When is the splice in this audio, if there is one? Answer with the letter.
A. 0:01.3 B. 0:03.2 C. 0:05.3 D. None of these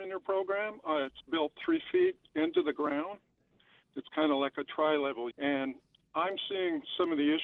C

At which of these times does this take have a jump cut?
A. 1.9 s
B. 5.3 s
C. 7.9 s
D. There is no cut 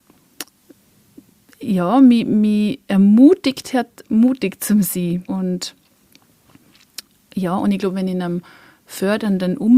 B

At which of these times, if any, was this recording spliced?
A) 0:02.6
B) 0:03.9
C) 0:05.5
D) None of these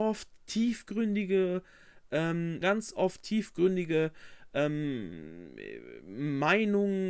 A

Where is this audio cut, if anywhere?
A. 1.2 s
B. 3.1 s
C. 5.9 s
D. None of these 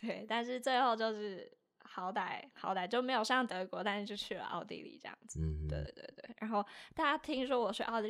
C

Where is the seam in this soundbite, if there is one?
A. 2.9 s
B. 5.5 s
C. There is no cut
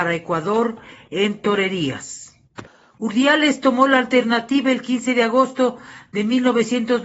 A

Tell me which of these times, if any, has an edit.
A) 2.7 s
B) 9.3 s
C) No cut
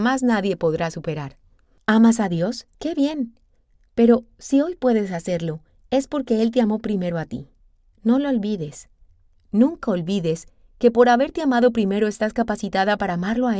A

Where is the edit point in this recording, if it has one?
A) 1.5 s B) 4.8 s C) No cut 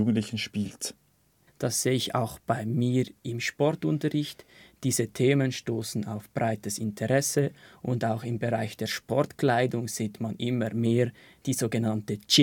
A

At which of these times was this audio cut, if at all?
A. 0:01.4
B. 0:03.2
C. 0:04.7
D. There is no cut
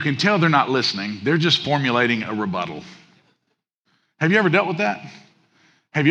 D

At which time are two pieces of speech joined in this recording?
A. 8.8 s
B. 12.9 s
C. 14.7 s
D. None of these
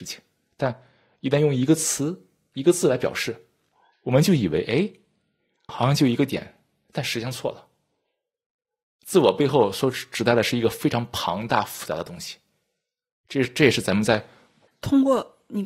C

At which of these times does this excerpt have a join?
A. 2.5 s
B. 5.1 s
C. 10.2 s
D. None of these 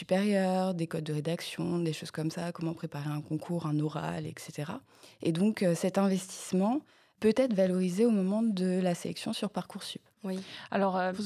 C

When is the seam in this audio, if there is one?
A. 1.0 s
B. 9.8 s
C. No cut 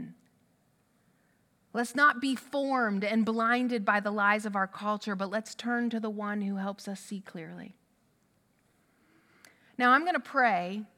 C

